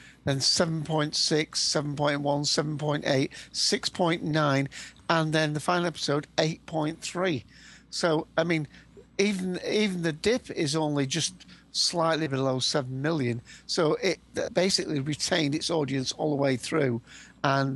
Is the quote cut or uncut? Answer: uncut